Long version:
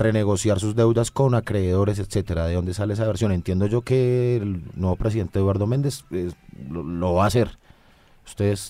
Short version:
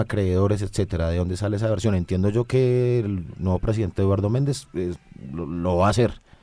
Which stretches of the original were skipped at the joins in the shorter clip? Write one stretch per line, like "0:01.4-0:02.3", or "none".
none